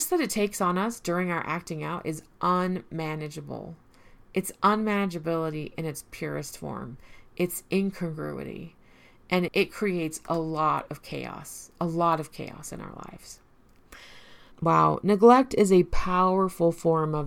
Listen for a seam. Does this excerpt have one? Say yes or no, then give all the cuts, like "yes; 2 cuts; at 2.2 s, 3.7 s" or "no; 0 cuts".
yes; 2 cuts; at 9.5 s, 14.5 s